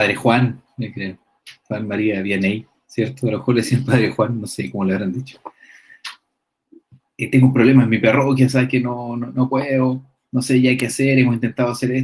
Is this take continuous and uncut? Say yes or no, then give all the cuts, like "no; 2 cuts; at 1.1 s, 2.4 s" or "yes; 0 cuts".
yes; 0 cuts